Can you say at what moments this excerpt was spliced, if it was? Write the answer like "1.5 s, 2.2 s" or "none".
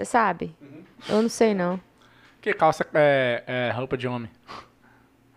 none